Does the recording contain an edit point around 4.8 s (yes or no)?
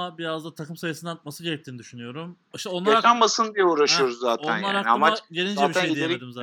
no